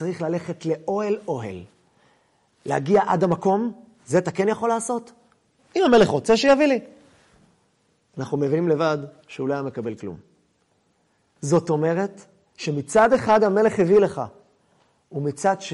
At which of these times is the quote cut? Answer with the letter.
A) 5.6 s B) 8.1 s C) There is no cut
A